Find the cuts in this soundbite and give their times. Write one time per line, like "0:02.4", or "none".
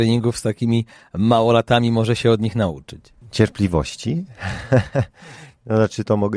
none

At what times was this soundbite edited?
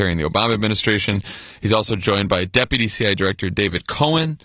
none

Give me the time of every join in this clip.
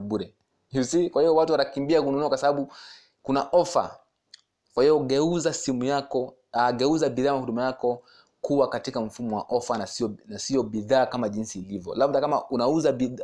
none

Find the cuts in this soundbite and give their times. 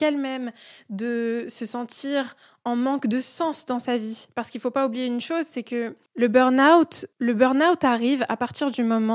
0:06.1
0:07.1

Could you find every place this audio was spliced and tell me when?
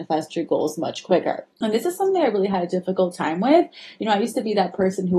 0:01.5

